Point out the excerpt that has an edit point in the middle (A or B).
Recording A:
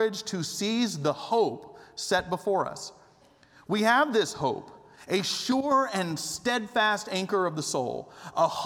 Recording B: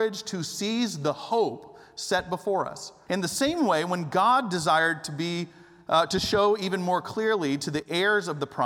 B